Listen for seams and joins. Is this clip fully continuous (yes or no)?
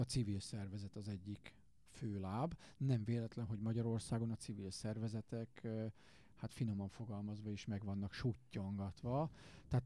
yes